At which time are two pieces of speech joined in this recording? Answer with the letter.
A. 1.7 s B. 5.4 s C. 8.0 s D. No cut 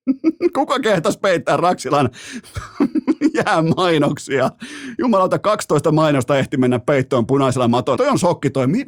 C